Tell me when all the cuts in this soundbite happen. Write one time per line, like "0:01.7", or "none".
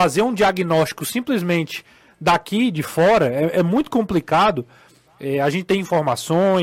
none